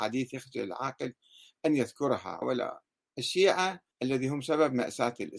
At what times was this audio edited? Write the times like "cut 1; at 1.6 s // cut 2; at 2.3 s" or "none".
cut 1; at 2.4 s // cut 2; at 3.9 s